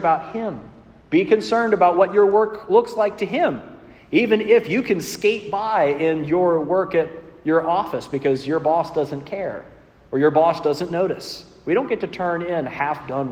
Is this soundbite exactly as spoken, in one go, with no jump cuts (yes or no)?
yes